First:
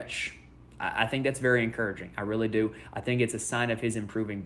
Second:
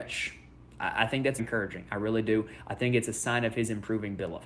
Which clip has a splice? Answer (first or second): second